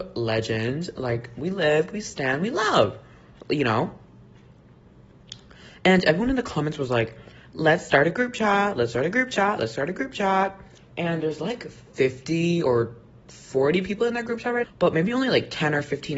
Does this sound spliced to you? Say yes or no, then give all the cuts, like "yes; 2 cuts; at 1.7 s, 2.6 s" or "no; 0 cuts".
yes; 2 cuts; at 10.8 s, 14.6 s